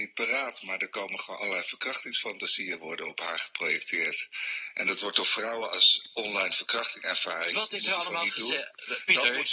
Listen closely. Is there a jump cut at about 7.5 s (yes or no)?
yes